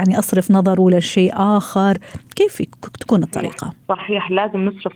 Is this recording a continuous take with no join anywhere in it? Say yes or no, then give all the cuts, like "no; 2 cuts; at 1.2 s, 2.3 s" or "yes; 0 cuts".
no; 1 cut; at 3.8 s